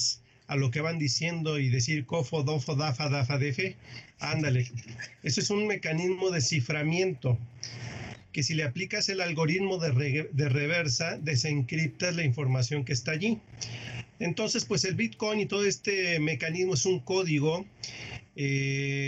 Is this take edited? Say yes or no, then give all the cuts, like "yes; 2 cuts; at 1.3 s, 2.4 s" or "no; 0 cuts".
no; 0 cuts